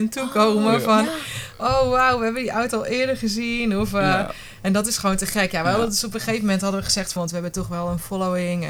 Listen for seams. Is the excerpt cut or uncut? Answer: cut